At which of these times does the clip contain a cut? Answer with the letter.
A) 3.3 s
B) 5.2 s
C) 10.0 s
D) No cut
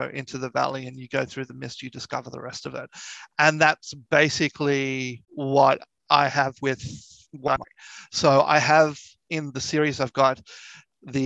B